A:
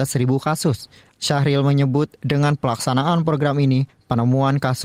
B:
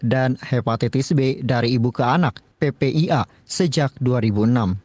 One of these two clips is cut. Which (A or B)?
A